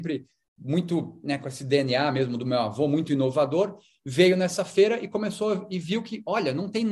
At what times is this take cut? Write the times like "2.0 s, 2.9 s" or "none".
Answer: none